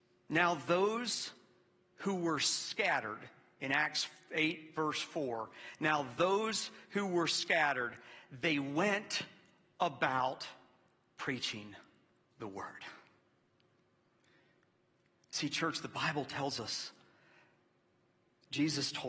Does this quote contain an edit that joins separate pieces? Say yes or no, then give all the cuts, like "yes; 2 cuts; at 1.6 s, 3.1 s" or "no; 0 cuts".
no; 0 cuts